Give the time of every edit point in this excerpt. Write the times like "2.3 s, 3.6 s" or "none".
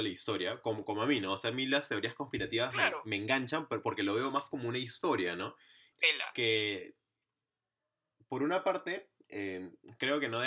5.9 s